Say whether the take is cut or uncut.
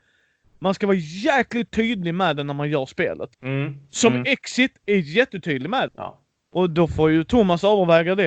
cut